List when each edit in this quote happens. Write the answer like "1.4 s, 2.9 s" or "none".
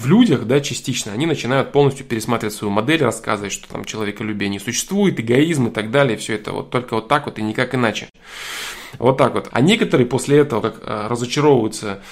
9.5 s, 10.6 s